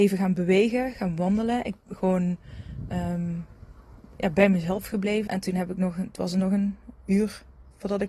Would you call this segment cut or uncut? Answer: cut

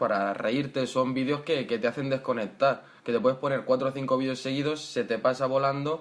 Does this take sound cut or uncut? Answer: uncut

